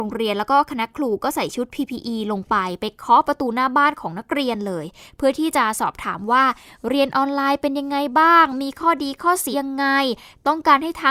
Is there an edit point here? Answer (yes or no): yes